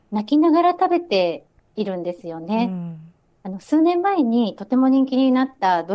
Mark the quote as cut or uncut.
uncut